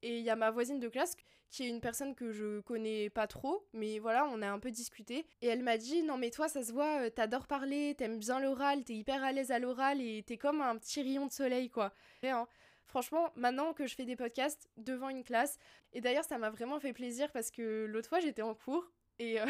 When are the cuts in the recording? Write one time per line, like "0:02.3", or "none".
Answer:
0:05.3
0:12.2
0:14.7

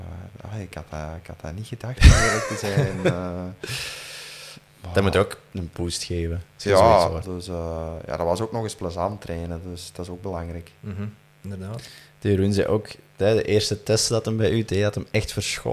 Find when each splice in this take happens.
0:07.2

